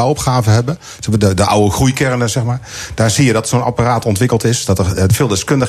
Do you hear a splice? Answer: no; 0 cuts

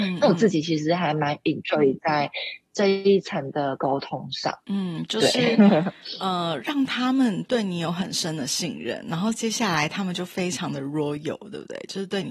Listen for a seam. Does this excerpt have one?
no; 0 cuts

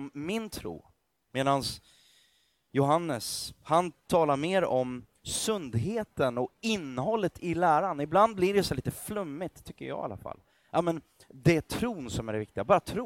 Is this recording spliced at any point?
no; 0 cuts

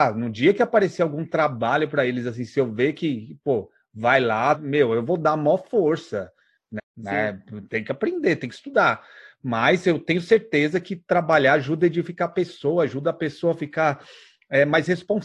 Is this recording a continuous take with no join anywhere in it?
no; 2 cuts; at 4.6 s, 6.8 s

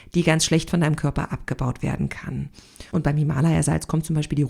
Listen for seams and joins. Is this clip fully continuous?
no; 1 cut; at 2.9 s

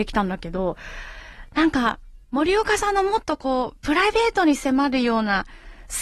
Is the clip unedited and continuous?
no; 1 cut; at 2.2 s

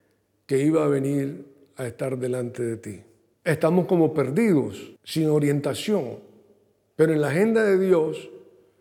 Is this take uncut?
no; 2 cuts; at 3.3 s, 5.0 s

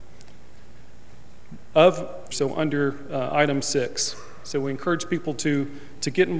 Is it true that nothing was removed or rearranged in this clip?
no; 1 cut; at 2.3 s

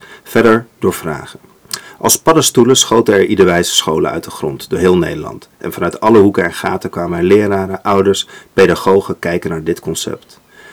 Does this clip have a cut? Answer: no; 0 cuts

